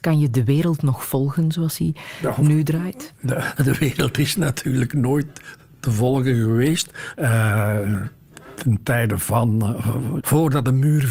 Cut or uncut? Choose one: cut